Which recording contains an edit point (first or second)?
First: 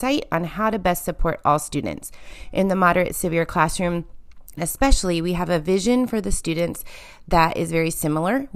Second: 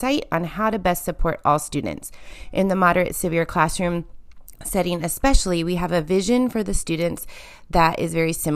first